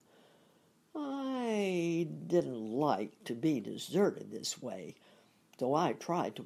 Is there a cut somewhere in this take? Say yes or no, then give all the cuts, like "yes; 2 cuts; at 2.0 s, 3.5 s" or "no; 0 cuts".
no; 0 cuts